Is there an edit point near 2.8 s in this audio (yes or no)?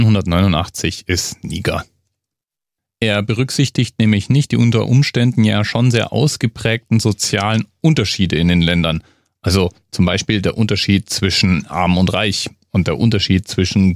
yes